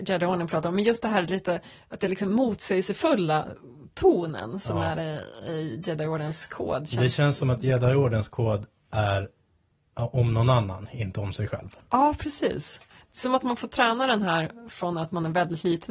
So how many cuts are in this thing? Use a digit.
0